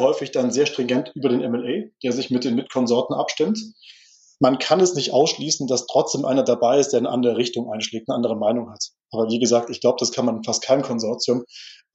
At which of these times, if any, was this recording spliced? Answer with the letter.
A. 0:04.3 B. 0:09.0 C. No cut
C